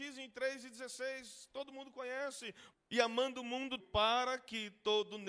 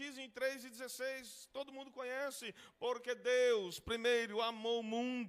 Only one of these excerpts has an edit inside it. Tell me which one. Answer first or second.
first